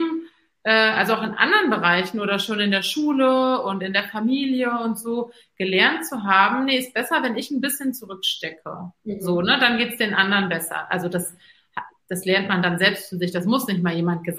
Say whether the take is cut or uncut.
uncut